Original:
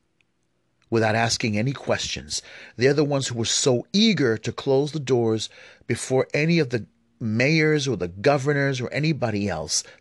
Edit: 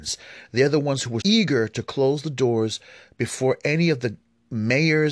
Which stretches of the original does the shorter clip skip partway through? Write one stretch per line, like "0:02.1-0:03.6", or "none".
0:03.4-0:03.9